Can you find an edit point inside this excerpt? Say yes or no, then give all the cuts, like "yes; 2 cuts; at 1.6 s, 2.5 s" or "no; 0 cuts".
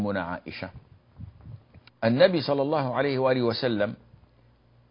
yes; 1 cut; at 1.9 s